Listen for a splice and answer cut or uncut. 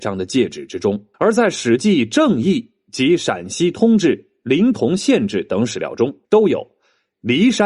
cut